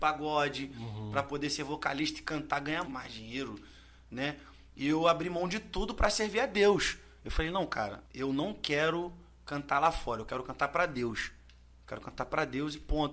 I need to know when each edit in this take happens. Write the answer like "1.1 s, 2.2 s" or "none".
2.8 s, 8.0 s